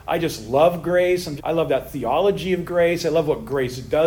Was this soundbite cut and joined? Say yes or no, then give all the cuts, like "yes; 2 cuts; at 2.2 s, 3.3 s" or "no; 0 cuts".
yes; 1 cut; at 1.4 s